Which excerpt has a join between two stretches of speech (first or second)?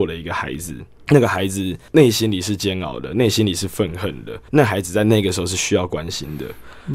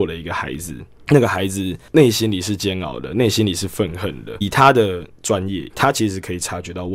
second